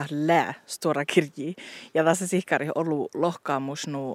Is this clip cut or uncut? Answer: uncut